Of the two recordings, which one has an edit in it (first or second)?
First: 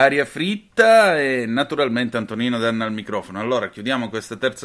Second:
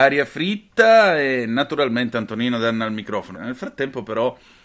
second